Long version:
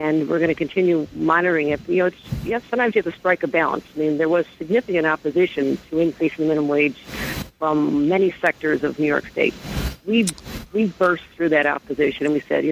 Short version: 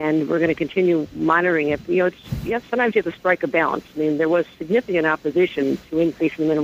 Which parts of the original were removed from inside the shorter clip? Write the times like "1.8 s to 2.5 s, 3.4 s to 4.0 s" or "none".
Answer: none